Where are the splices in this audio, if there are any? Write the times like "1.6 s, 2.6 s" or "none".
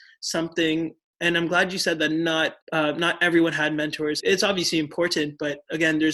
2.6 s, 4.2 s